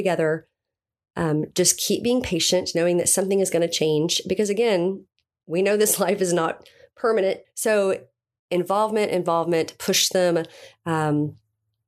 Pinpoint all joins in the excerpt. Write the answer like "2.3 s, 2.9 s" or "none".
7.4 s